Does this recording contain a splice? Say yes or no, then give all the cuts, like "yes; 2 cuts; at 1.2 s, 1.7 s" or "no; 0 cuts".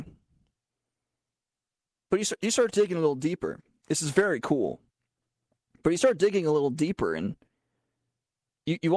no; 0 cuts